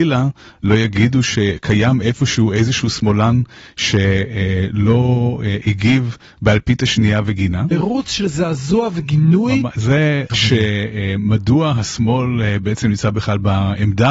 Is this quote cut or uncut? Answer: cut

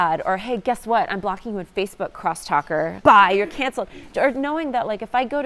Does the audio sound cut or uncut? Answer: cut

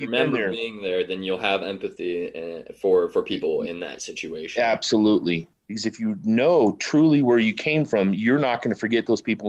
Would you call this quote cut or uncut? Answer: cut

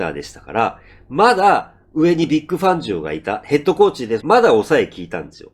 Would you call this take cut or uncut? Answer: cut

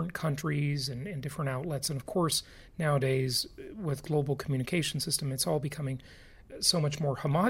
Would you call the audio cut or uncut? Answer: uncut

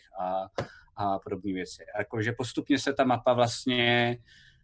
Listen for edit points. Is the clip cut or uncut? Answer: uncut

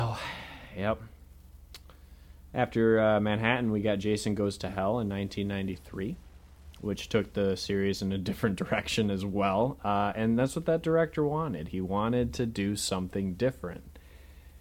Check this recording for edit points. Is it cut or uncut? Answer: uncut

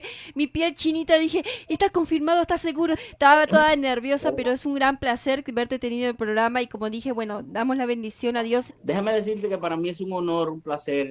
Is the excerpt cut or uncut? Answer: cut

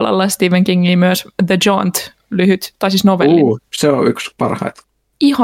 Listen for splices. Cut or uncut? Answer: uncut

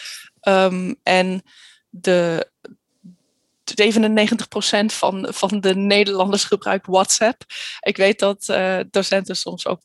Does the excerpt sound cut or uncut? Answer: cut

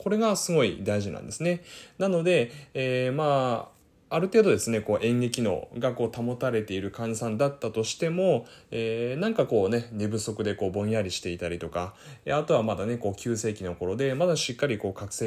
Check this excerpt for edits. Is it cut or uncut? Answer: uncut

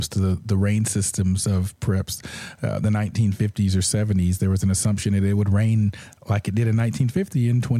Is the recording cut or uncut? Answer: uncut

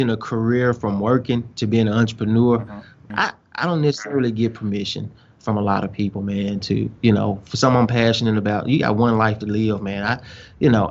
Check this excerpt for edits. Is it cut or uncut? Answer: cut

